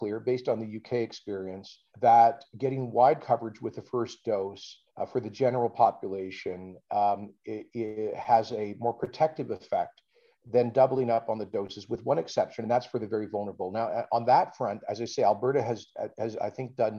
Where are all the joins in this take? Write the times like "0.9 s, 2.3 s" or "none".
1.9 s, 4.9 s

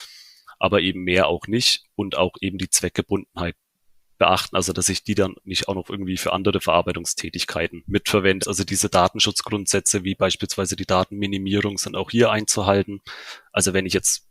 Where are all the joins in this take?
4.7 s, 8.4 s

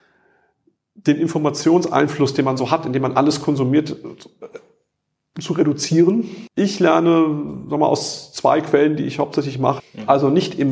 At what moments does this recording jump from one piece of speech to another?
6.5 s, 9.8 s

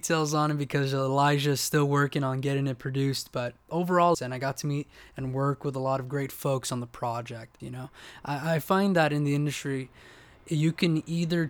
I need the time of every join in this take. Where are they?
4.1 s, 7.6 s

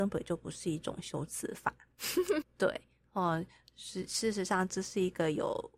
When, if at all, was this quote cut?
2.4 s

